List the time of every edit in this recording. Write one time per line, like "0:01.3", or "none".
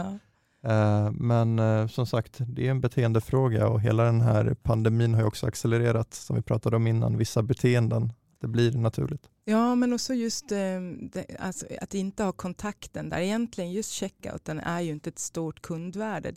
none